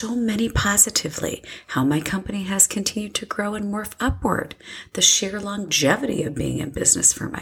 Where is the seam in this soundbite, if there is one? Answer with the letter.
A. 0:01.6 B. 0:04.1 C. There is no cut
C